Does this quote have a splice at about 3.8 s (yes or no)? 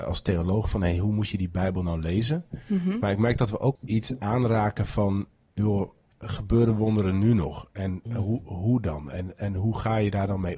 yes